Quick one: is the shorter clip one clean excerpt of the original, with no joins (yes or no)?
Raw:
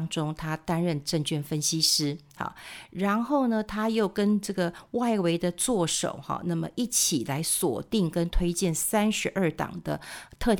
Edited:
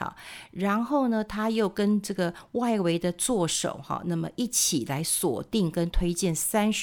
yes